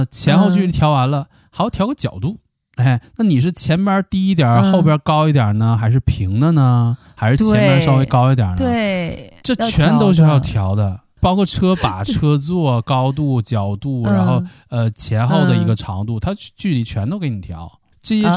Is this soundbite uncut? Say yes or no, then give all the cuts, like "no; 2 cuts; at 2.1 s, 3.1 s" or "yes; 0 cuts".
yes; 0 cuts